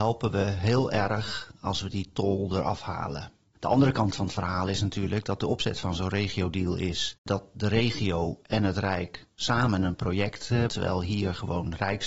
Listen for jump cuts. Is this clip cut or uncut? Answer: cut